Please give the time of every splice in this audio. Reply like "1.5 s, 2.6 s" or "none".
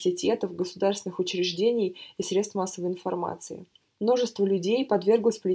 none